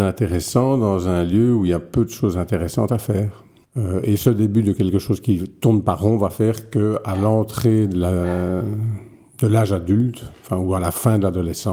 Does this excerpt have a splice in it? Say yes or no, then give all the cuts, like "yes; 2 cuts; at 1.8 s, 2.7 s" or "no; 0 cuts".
yes; 1 cut; at 3.6 s